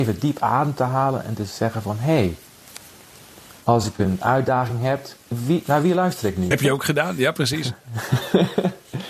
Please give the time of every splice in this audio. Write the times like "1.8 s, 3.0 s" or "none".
5.3 s, 6.5 s